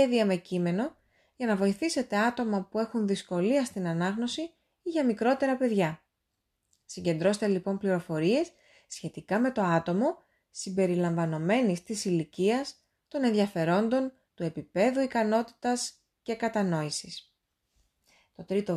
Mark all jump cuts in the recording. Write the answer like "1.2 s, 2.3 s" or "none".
14.3 s

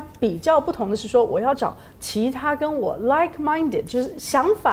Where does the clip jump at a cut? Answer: none

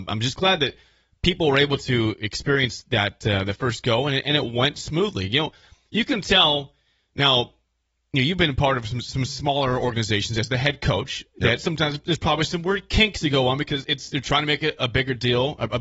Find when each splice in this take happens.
14.8 s

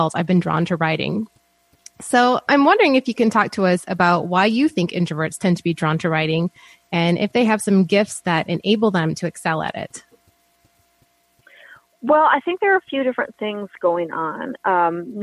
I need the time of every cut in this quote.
none

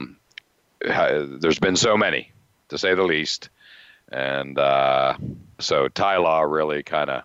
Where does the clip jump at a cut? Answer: 5.6 s

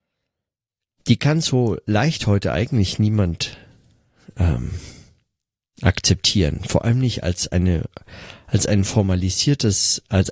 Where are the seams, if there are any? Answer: none

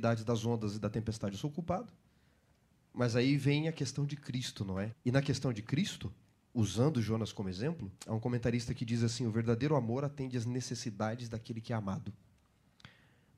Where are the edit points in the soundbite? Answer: 4.9 s, 8.0 s

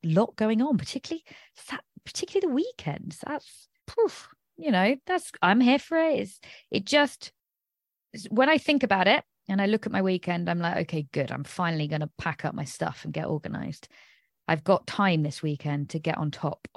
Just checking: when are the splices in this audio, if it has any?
3.8 s

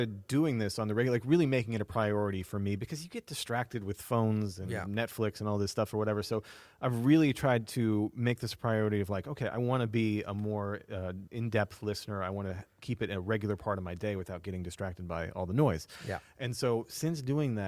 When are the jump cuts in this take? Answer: 11.3 s

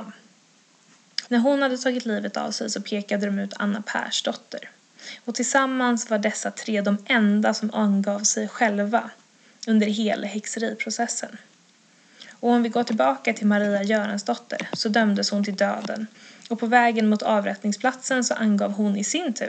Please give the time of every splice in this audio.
1.3 s

